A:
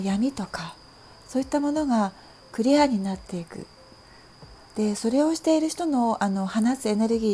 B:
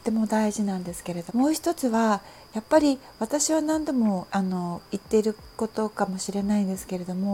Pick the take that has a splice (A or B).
B